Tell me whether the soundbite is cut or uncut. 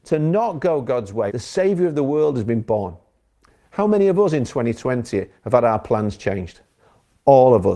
cut